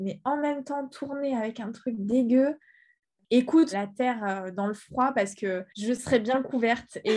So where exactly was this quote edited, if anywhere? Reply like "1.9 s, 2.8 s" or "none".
3.7 s, 5.7 s